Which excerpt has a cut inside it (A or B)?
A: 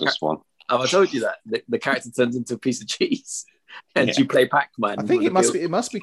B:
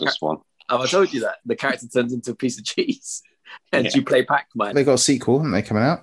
B